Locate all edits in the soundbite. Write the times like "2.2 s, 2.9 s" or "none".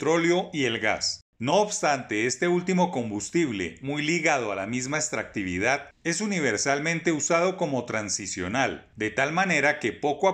none